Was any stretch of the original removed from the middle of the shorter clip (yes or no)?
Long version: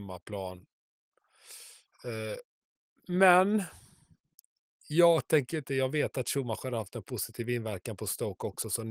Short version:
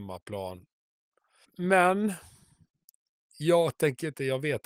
yes